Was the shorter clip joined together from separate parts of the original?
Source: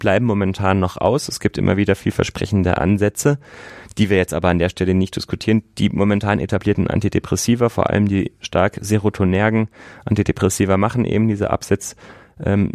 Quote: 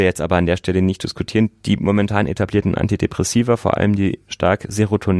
no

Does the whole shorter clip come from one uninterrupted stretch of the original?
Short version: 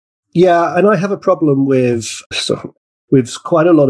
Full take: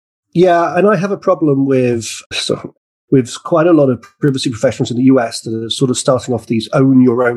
yes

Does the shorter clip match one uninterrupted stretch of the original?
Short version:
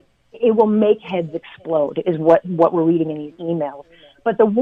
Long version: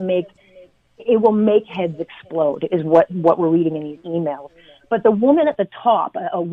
yes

